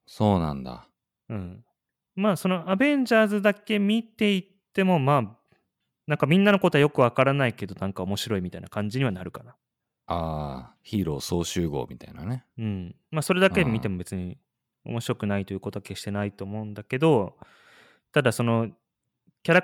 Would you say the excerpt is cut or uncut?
uncut